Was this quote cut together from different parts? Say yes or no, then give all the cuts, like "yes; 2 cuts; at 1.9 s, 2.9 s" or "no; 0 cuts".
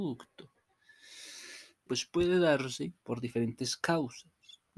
yes; 2 cuts; at 1.9 s, 3.0 s